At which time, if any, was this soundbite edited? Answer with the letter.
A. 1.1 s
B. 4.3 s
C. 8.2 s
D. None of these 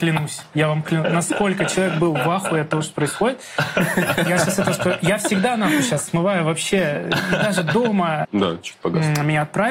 C